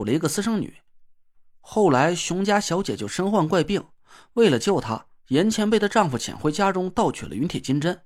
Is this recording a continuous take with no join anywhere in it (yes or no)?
yes